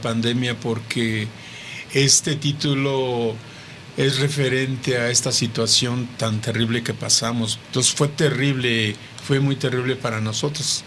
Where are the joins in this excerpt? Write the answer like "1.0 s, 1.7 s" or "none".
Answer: 1.8 s, 7.6 s